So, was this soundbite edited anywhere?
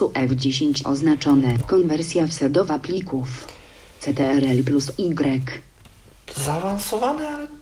yes; 1 cut; at 1.6 s

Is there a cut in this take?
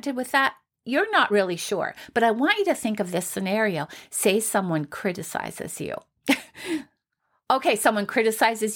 no; 0 cuts

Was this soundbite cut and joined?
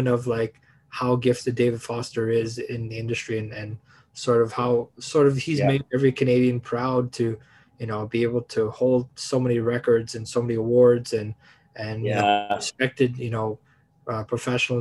no; 0 cuts

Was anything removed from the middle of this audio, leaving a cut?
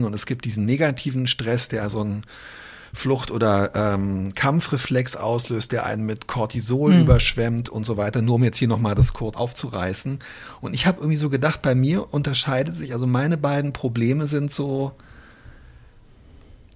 yes; 1 cut; at 9.3 s

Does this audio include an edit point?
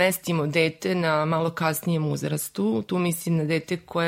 no; 0 cuts

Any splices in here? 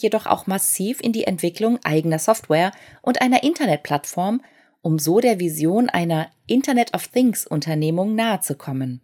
no; 0 cuts

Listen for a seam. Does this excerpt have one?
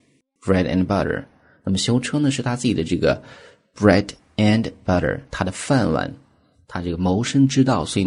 no; 0 cuts

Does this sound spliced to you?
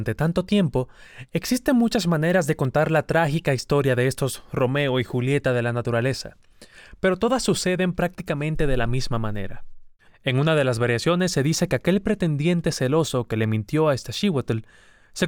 yes; 1 cut; at 10.1 s

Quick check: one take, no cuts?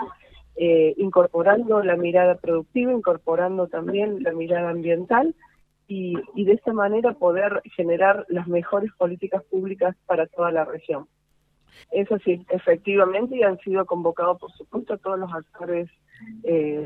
no; 1 cut; at 11.8 s

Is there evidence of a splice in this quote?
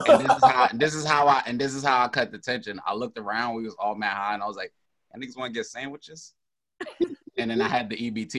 no; 0 cuts

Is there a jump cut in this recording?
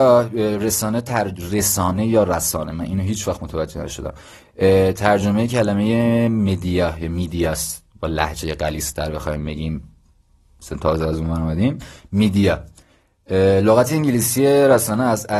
no; 0 cuts

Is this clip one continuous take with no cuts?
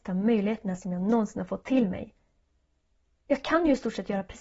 yes; 0 cuts

